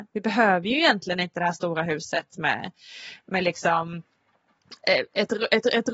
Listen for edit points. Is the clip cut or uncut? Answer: uncut